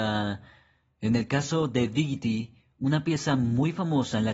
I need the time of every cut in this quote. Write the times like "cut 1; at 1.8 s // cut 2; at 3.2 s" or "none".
none